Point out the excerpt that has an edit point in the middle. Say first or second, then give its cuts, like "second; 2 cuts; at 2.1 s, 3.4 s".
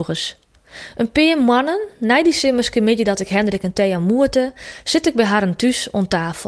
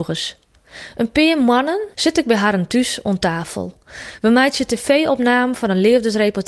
second; 1 cut; at 1.9 s